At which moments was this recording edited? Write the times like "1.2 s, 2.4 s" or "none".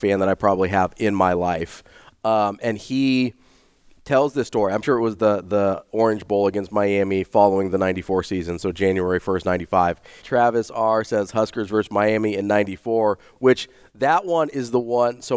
4.8 s, 10.2 s